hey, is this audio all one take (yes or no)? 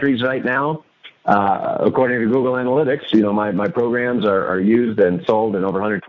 yes